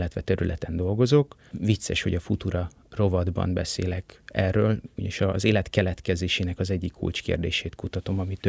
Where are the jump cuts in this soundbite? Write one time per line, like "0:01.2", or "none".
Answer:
0:04.9